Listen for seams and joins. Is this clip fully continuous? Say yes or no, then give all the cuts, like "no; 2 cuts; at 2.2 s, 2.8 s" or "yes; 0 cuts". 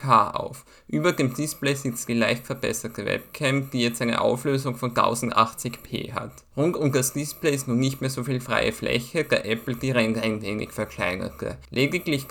yes; 0 cuts